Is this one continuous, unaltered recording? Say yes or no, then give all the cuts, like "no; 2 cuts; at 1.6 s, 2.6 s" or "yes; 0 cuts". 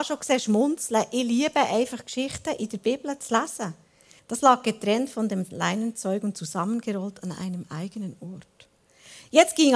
no; 1 cut; at 4.2 s